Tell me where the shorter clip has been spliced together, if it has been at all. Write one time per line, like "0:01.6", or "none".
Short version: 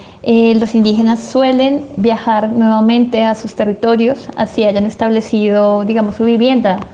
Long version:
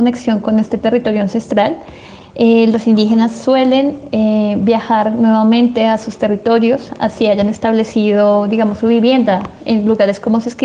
0:02.0